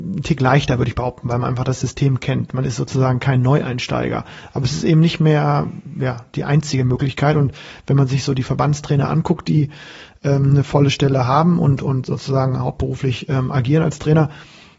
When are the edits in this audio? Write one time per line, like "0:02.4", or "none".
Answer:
none